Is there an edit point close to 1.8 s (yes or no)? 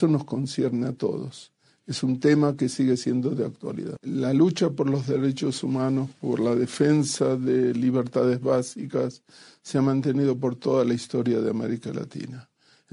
no